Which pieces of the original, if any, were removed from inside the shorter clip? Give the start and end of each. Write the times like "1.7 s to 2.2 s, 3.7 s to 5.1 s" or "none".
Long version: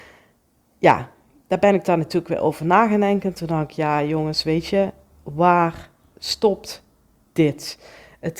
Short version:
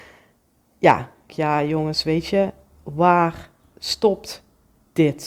1.3 s to 3.7 s

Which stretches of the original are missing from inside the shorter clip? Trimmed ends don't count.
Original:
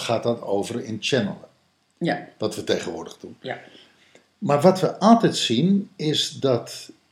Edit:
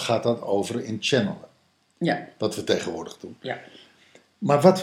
none

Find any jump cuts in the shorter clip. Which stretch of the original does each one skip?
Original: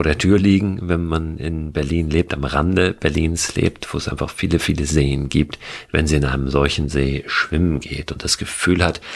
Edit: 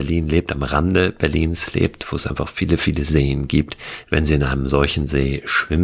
none

